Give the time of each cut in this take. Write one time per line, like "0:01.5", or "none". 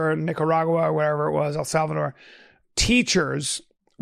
none